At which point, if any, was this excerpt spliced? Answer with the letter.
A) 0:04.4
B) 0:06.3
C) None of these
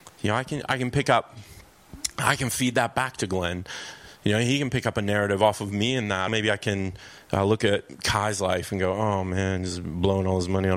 B